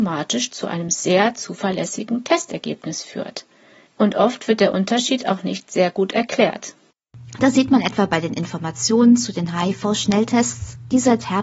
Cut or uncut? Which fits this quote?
cut